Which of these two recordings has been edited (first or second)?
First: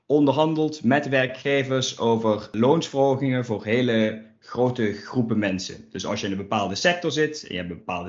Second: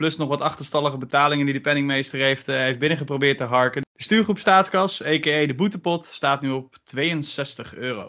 second